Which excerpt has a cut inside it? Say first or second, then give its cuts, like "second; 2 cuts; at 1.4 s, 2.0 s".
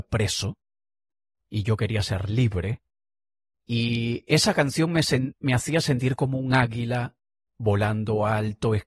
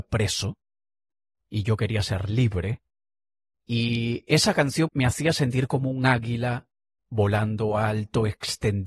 second; 1 cut; at 4.9 s